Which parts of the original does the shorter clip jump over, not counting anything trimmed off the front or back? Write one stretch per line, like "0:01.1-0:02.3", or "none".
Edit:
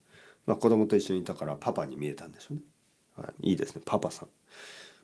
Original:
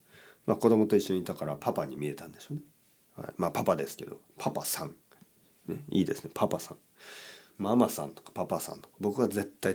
0:03.4-0:05.9